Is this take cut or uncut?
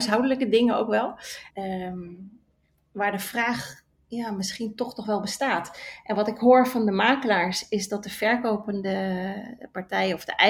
cut